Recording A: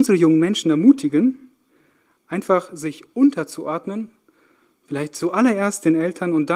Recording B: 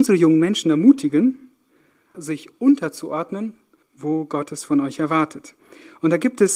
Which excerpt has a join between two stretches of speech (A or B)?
B